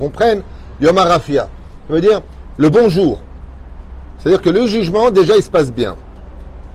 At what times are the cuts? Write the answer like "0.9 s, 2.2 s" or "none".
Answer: none

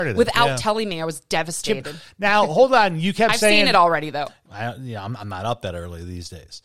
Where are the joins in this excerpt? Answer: 4.5 s

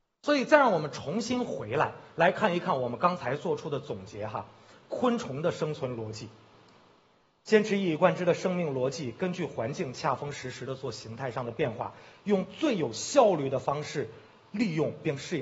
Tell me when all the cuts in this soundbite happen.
none

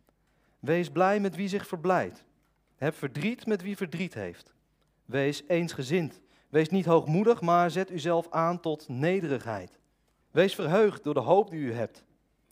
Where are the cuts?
10.2 s

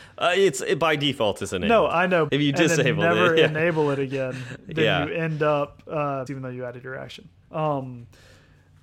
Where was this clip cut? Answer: 2.3 s, 6.3 s, 7.4 s

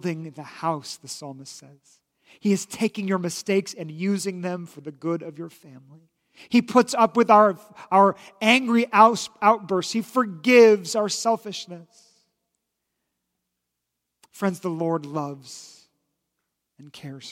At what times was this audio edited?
none

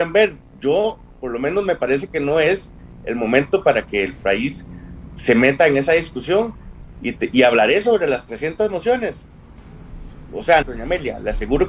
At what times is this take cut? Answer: 10.6 s

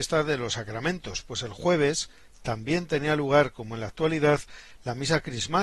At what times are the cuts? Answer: none

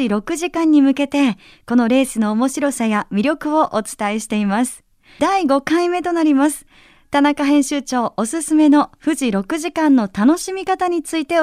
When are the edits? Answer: 5.2 s

